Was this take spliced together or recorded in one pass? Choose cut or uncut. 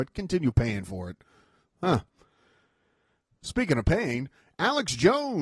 uncut